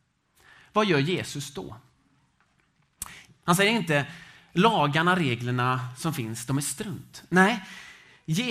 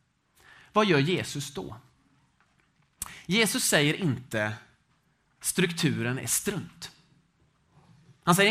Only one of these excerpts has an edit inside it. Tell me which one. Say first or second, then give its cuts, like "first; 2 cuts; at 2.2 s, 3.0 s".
first; 1 cut; at 3.3 s